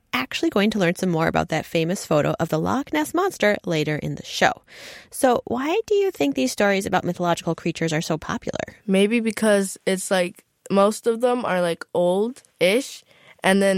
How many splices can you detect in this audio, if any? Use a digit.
2